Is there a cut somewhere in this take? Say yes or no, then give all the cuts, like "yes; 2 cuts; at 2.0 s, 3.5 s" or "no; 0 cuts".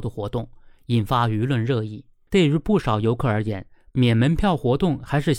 yes; 1 cut; at 2.3 s